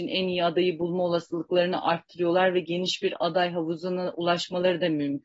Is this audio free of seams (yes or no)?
yes